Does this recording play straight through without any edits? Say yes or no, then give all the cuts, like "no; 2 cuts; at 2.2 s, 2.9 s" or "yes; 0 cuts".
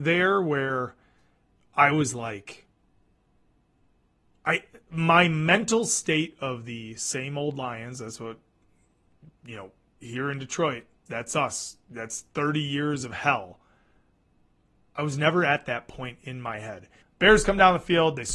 no; 2 cuts; at 11.1 s, 17.0 s